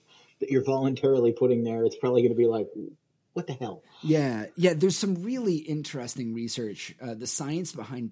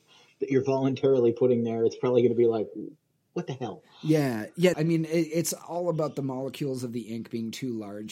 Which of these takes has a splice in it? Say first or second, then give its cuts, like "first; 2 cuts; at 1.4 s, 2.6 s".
second; 1 cut; at 4.7 s